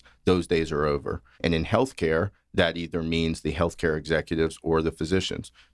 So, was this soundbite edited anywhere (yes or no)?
yes